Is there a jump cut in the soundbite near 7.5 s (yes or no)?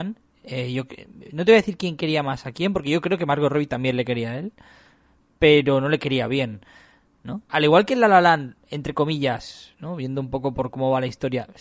yes